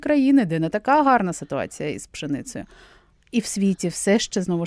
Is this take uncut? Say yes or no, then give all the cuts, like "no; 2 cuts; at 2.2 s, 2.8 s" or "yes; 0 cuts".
yes; 0 cuts